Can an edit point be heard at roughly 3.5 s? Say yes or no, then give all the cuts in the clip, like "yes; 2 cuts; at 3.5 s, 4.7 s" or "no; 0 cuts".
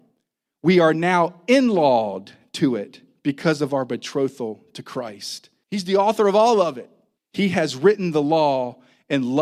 no; 2 cuts; at 5.6 s, 7.2 s